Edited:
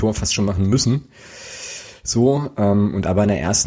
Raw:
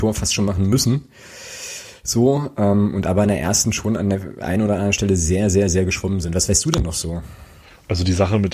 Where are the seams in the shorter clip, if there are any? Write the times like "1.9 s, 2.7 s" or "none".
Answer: none